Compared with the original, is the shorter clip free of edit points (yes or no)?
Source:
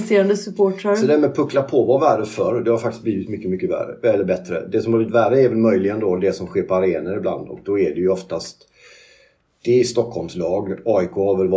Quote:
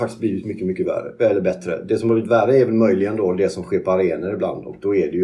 yes